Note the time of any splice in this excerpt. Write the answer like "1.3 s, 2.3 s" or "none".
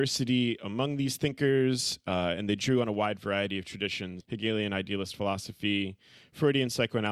4.2 s